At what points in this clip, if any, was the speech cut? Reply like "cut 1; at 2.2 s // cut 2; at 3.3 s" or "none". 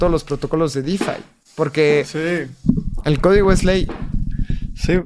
none